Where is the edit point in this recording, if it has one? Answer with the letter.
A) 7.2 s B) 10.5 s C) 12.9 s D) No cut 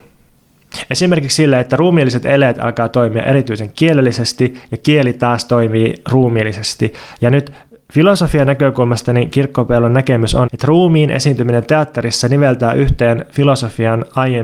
B